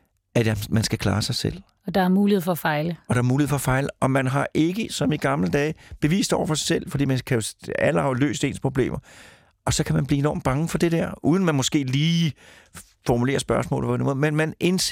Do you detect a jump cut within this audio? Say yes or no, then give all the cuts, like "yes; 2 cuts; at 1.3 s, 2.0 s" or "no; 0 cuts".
no; 0 cuts